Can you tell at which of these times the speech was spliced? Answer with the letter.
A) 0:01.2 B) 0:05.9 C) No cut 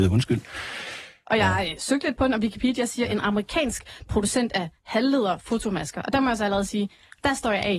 A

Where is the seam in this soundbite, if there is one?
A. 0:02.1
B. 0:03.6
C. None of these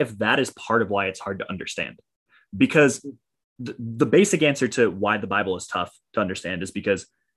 B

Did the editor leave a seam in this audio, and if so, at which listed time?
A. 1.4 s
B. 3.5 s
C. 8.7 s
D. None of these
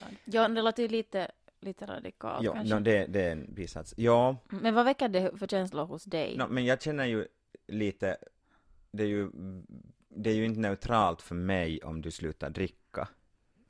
B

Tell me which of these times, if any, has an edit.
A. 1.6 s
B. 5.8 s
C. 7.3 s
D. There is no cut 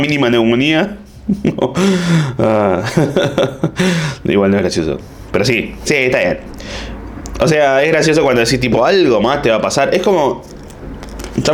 B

